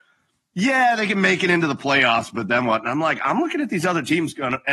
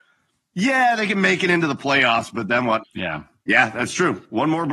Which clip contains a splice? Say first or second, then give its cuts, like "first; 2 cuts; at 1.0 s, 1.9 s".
second; 1 cut; at 2.8 s